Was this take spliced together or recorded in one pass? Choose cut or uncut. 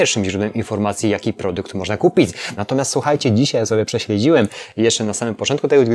cut